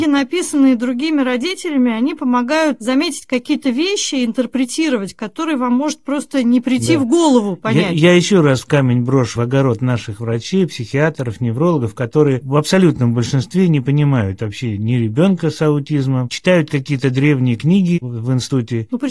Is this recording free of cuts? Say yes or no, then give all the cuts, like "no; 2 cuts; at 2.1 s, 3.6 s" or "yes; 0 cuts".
yes; 0 cuts